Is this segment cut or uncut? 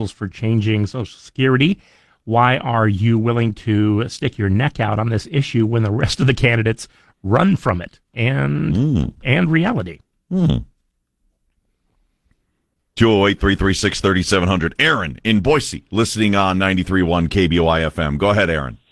uncut